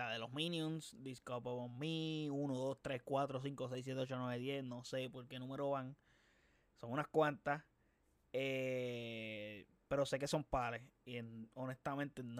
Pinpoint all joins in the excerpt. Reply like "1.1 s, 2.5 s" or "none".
none

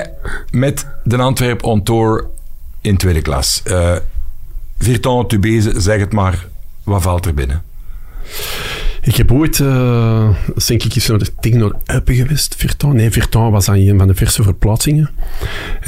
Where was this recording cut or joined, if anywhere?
none

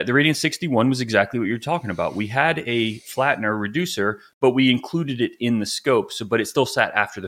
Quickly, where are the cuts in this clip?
none

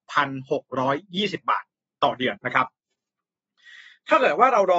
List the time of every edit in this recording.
2.4 s

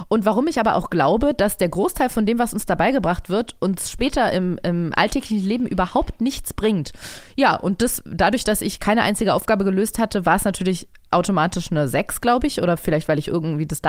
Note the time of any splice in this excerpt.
none

